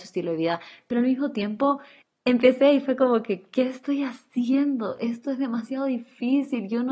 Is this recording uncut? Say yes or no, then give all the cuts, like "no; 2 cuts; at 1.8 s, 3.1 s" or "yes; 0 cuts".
yes; 0 cuts